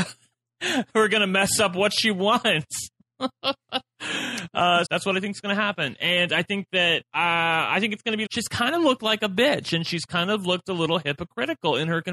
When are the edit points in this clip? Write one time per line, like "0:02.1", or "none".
0:04.8
0:07.0
0:08.3